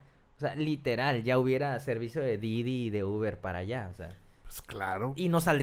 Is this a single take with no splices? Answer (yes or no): yes